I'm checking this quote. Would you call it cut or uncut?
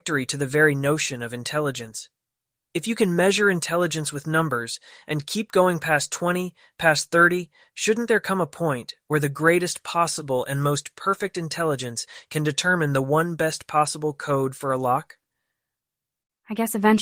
cut